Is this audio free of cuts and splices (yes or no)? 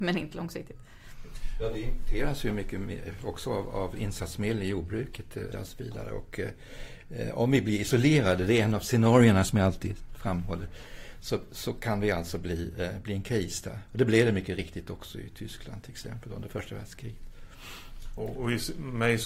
no